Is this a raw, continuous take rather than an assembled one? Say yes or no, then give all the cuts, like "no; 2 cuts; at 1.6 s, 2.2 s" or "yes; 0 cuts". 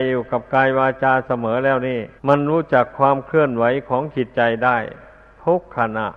no; 1 cut; at 2.2 s